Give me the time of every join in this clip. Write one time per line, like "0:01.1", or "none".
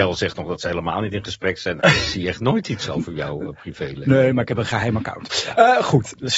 0:01.8